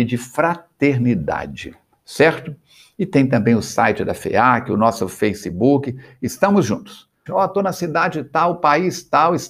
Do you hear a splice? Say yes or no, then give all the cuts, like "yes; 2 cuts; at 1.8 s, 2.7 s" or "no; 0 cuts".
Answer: yes; 1 cut; at 7.3 s